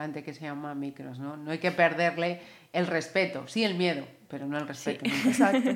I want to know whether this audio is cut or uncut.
uncut